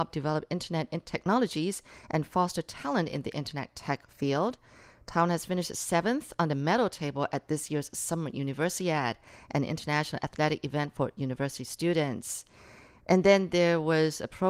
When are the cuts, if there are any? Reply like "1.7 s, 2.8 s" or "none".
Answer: none